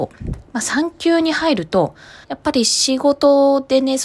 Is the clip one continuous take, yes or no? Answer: no